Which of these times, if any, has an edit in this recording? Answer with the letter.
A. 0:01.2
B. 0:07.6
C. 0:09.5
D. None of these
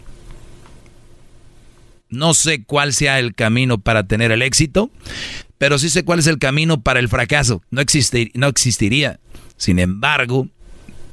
B